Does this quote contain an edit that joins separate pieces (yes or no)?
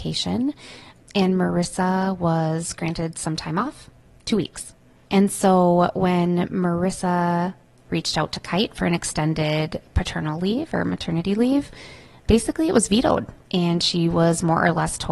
no